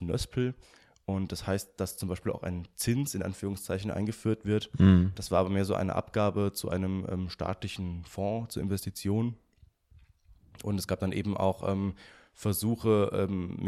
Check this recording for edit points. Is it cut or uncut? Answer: uncut